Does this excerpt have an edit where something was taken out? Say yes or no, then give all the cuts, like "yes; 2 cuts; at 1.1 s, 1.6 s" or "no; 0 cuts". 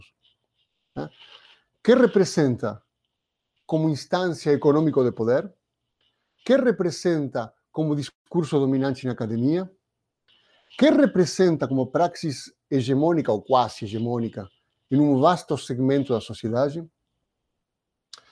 no; 0 cuts